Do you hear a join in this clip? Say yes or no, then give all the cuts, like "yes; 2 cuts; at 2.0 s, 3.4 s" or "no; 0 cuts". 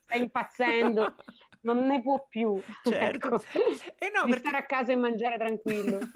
no; 0 cuts